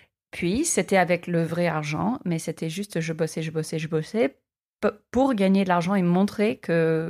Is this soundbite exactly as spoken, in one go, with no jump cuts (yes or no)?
yes